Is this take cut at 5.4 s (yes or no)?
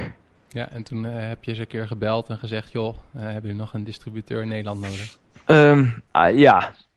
no